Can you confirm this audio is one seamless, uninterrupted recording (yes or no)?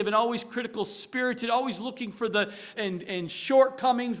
no